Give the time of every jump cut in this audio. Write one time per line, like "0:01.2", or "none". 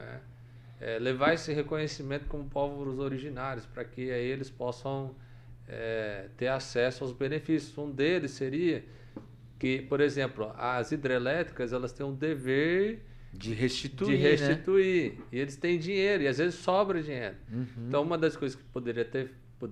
none